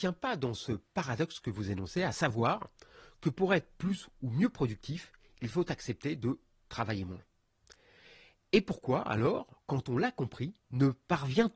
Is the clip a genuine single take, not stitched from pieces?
yes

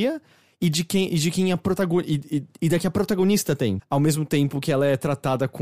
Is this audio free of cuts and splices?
no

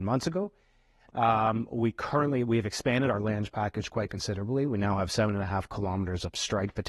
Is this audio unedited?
yes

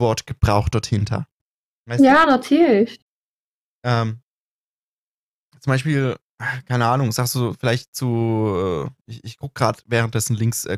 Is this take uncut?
yes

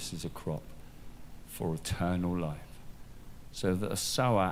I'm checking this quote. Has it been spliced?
no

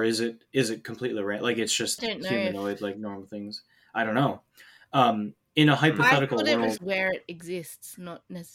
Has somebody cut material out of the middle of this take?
yes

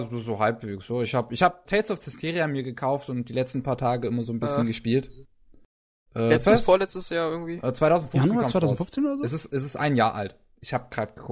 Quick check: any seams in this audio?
yes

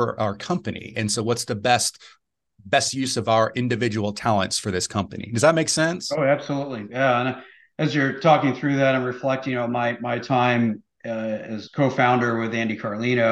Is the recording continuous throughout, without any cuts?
no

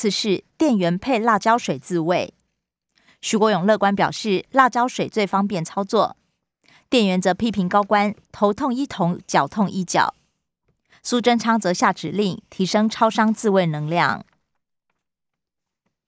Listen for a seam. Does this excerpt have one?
no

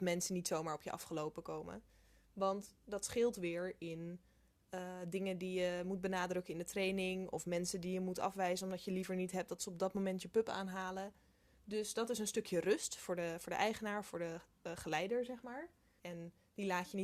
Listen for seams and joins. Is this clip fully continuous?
no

